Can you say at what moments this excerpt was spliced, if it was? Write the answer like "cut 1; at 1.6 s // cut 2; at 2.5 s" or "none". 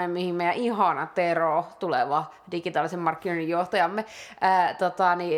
none